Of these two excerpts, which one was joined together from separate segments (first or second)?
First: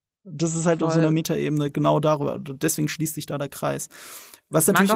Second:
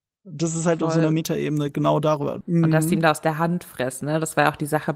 second